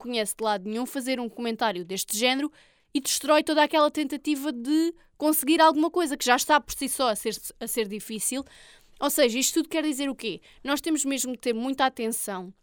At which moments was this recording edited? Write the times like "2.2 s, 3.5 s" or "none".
none